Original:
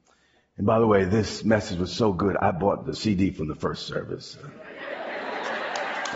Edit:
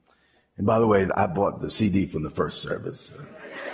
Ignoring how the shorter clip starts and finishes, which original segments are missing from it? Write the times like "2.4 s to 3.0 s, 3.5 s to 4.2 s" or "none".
1.1 s to 2.3 s